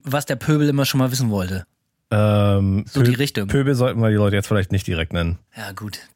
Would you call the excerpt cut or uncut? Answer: uncut